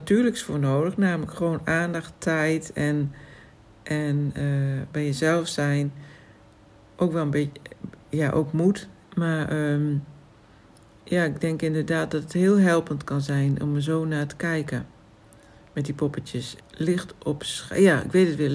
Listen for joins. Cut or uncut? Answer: cut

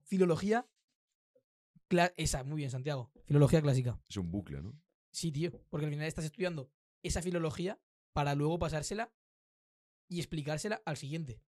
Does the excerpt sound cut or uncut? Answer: uncut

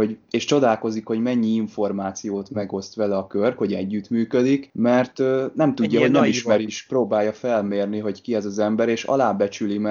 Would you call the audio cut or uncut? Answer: cut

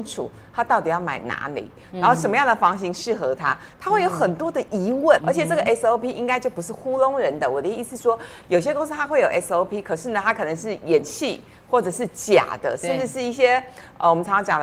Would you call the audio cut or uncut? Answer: cut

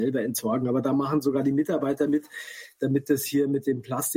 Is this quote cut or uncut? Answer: uncut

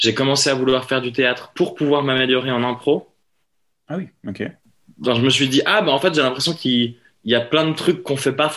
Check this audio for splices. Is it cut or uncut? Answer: uncut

